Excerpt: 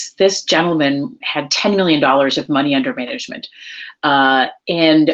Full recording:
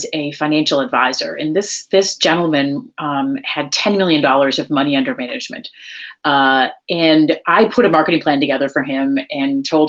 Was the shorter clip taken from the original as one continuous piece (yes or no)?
no